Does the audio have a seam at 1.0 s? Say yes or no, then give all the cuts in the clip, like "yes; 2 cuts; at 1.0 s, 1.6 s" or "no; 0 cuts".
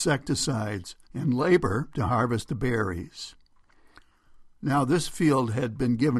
yes; 1 cut; at 1.0 s